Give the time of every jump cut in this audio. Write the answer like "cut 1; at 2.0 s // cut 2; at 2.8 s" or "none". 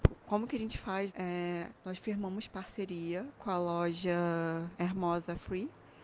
cut 1; at 1.1 s // cut 2; at 4.7 s